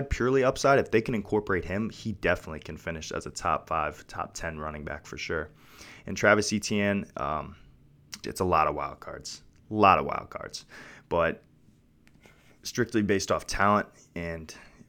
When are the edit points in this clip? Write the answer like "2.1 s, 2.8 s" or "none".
8.2 s